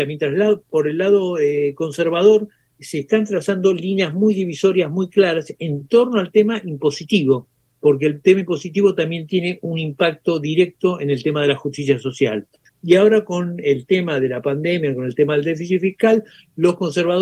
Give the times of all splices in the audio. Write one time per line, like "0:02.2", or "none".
0:12.6

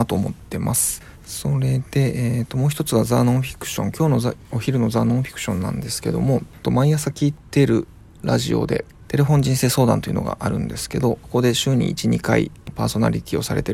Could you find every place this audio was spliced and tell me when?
none

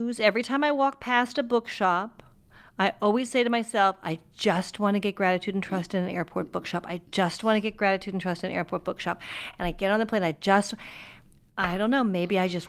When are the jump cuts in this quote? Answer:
none

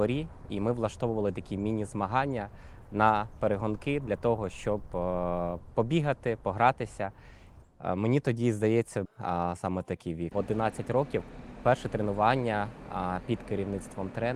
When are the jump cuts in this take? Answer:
0:07.6
0:09.1
0:10.3

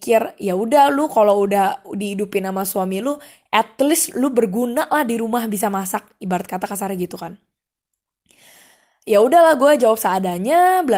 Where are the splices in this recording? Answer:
none

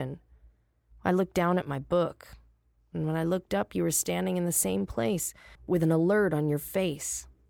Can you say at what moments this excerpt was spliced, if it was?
none

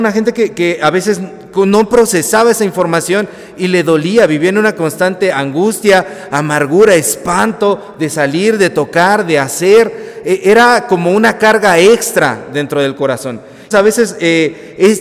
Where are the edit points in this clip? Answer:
0:13.7

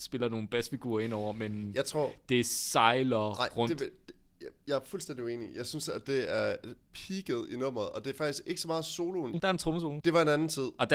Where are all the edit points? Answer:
0:09.3

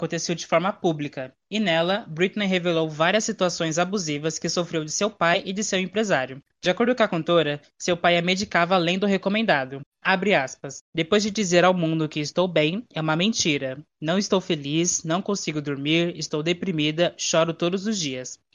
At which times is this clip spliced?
none

